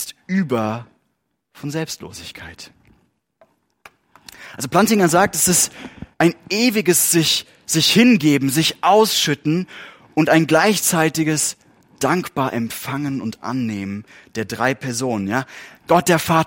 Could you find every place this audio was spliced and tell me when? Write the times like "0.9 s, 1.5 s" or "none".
6.1 s